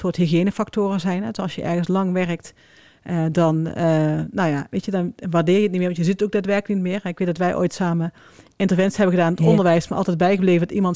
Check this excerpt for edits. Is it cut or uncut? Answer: uncut